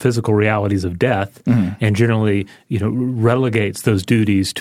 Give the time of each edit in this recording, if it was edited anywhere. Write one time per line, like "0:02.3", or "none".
none